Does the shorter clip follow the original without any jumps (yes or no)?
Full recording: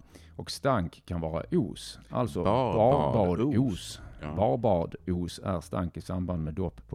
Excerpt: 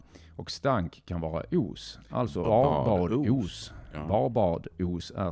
no